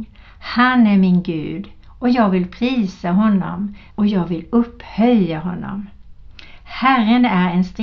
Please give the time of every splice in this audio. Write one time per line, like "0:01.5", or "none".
0:03.9